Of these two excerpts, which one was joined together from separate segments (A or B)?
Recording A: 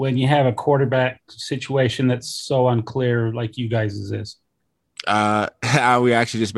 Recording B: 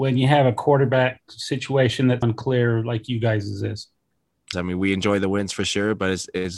B